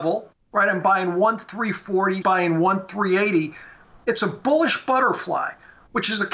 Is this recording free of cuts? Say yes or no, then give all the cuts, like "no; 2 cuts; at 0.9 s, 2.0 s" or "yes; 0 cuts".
no; 1 cut; at 2.2 s